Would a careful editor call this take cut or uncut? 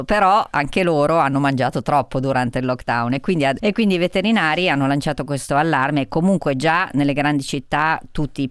cut